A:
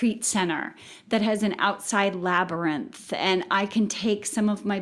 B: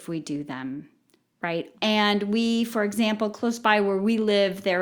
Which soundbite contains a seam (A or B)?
B